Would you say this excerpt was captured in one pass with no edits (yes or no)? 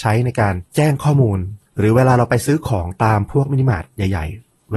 no